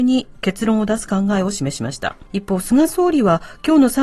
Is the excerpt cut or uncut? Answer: cut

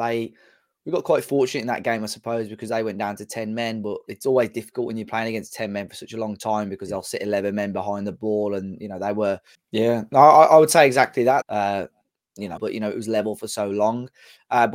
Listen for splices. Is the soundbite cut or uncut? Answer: cut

